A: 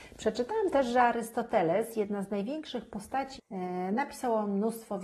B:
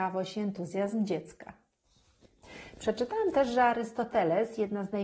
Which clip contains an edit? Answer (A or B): A